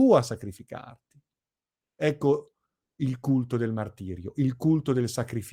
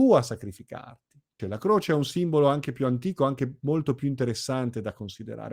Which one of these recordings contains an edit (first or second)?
second